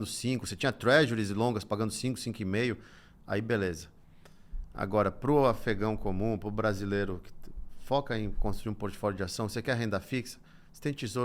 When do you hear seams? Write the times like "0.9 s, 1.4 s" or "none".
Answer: none